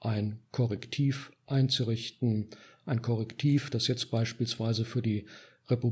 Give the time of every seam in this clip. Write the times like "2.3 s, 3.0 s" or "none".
none